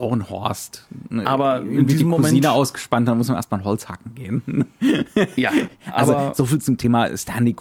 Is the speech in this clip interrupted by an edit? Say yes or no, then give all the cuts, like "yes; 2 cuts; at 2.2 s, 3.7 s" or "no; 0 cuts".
no; 0 cuts